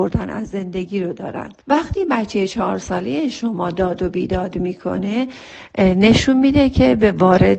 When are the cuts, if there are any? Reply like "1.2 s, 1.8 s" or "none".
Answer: 1.6 s